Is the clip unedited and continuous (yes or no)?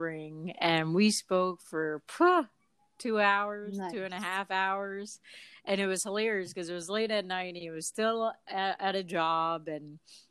yes